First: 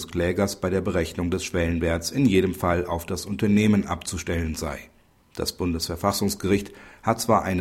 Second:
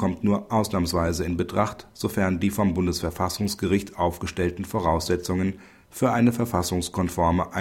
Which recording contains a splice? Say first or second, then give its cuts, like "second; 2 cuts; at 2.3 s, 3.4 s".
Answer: first; 1 cut; at 5.2 s